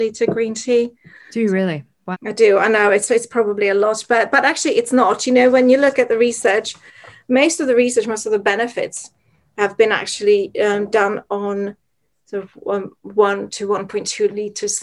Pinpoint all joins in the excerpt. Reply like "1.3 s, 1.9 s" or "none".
2.1 s

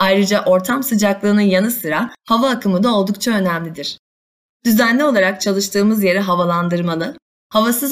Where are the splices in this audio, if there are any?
none

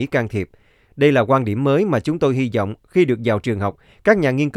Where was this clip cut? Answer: none

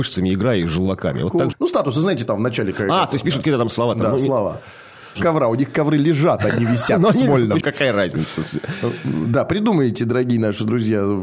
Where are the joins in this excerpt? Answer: 1.5 s, 5.2 s, 7.6 s

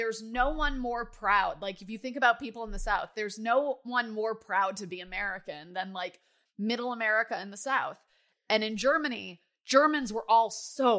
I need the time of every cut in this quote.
none

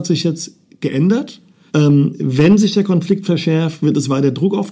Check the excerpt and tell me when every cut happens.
1.7 s

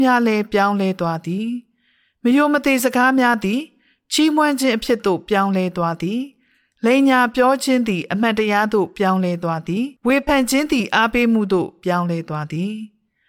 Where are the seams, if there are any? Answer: 10.0 s

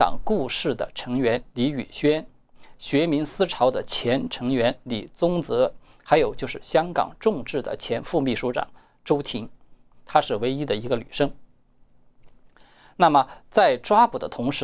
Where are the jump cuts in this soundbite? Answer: none

